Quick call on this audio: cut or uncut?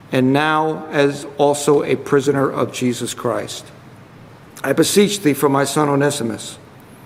uncut